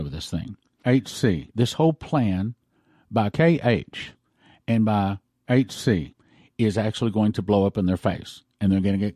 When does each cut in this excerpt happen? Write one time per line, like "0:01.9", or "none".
0:01.5